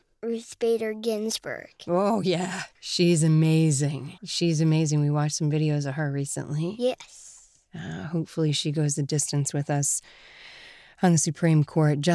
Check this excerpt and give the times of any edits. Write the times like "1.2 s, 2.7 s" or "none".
2.8 s, 4.2 s